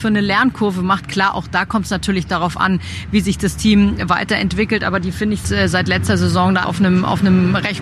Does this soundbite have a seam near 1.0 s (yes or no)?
no